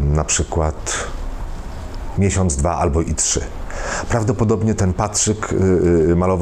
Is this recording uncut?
no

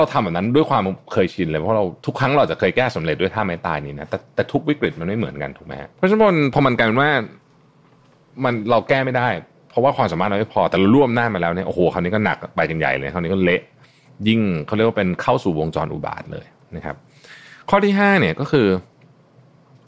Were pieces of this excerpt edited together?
yes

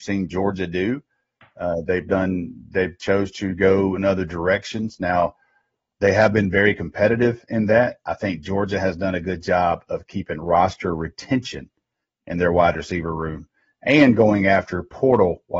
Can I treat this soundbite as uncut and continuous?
yes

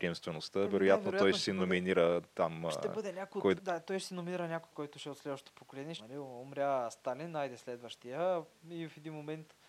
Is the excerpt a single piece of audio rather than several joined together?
no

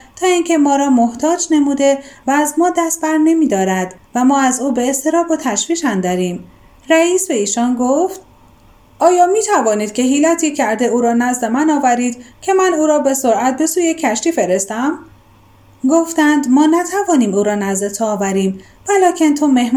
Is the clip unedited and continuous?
no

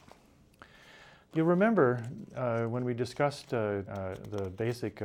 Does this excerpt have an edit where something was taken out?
yes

